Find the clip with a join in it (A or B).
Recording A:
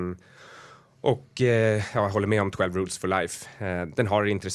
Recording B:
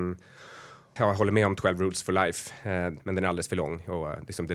B